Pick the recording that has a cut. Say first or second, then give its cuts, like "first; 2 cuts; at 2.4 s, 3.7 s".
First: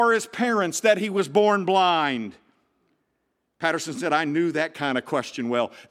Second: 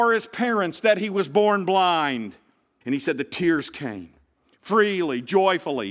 second; 1 cut; at 2.8 s